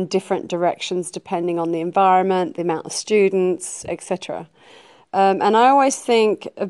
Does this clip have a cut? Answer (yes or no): no